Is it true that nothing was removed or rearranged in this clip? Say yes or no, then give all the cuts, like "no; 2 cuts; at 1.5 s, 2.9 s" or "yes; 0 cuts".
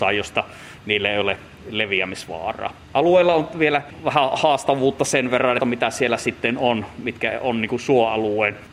no; 2 cuts; at 2.8 s, 5.6 s